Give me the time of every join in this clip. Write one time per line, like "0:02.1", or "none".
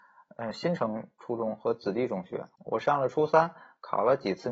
0:02.6